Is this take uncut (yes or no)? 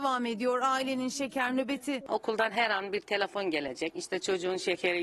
yes